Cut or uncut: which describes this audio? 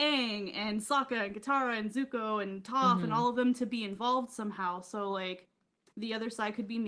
uncut